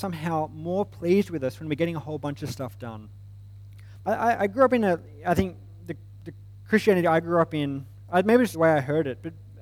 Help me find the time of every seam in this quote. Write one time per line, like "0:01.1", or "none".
0:04.0
0:08.5